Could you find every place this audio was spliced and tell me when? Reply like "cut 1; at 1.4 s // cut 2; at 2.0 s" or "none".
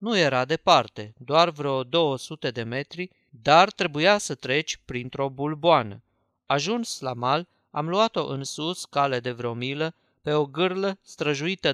none